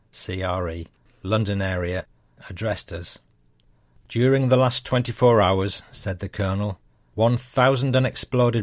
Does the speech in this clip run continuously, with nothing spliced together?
yes; 0 cuts

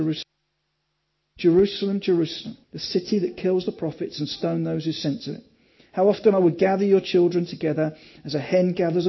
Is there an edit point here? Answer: yes; 1 cut; at 2.6 s

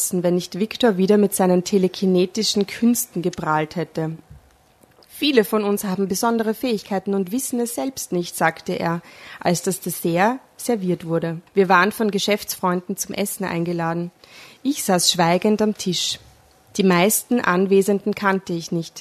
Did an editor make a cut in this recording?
yes; 1 cut; at 11.5 s

